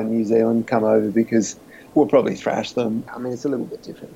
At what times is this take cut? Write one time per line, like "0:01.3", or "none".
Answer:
0:01.9
0:03.1